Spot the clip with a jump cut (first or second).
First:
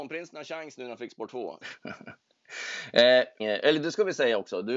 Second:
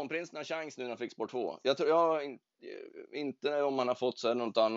first